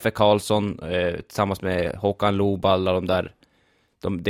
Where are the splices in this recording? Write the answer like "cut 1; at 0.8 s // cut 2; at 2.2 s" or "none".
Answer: none